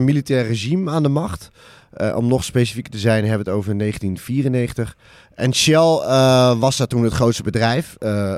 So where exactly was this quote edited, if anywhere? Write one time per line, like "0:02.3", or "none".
none